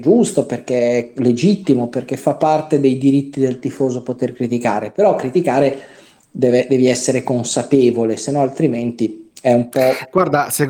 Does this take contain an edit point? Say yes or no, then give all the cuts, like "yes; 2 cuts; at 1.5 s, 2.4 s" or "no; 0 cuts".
no; 0 cuts